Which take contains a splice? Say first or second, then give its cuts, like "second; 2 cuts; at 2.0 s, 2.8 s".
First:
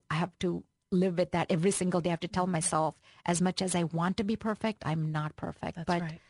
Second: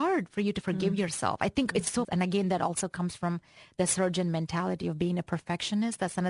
second; 1 cut; at 2.0 s